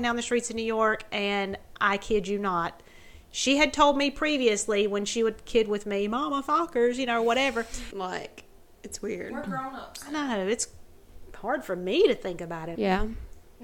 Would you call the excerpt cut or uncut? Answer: cut